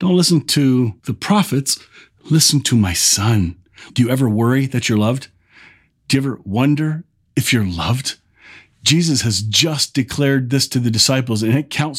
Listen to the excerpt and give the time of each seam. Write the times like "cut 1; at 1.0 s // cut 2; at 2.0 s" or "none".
cut 1; at 1.0 s // cut 2; at 3.9 s